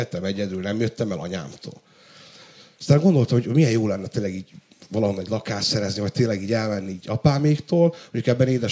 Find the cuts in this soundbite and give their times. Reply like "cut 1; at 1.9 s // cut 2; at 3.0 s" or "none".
none

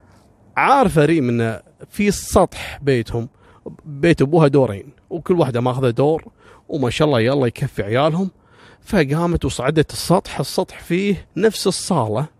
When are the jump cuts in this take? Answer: cut 1; at 11.3 s

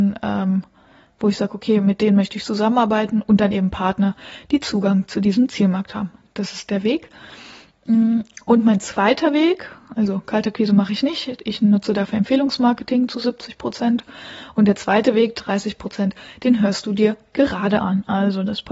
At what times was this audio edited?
none

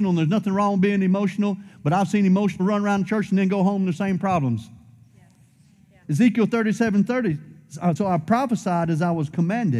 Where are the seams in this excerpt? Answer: cut 1; at 2.6 s // cut 2; at 6.0 s // cut 3; at 8.0 s

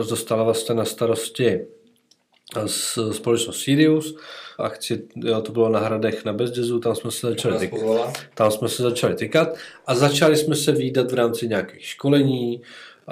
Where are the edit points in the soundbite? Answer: cut 1; at 4.6 s

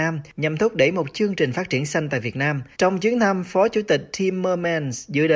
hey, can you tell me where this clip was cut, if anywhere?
cut 1; at 2.7 s

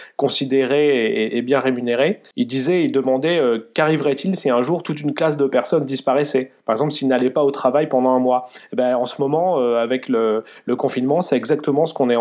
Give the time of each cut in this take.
cut 1; at 2.3 s

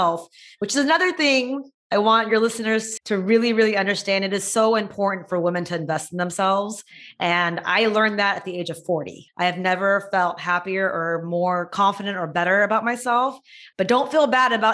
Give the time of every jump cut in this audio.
cut 1; at 3.0 s // cut 2; at 9.3 s

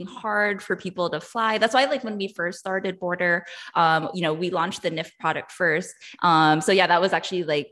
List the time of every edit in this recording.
cut 1; at 4.1 s // cut 2; at 6.2 s

